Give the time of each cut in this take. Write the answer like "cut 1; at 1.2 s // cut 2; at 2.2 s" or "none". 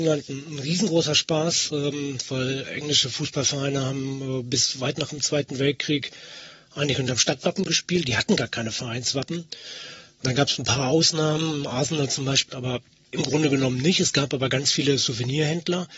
cut 1; at 12.5 s